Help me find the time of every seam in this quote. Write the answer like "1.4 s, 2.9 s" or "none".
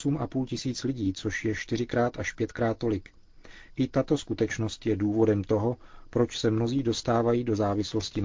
none